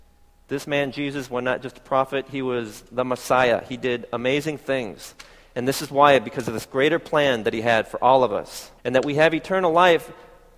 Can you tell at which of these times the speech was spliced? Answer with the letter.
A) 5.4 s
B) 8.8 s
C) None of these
B